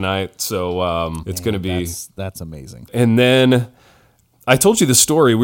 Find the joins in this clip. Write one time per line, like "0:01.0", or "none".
0:01.2
0:02.9